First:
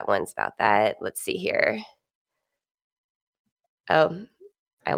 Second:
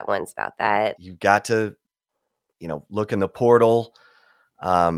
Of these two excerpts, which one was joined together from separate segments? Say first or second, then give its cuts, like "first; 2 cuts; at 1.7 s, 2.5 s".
second; 1 cut; at 1.0 s